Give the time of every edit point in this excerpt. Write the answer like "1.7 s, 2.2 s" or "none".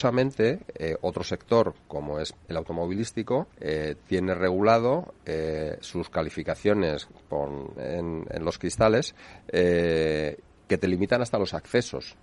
3.5 s, 7.8 s